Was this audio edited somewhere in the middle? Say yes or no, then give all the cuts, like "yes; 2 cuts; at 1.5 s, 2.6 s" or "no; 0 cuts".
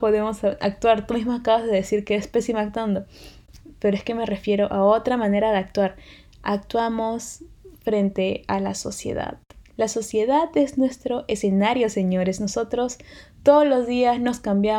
no; 0 cuts